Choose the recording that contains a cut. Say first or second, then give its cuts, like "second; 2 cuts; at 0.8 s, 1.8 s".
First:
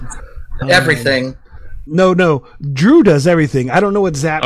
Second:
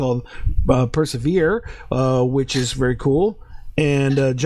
first; 1 cut; at 1.9 s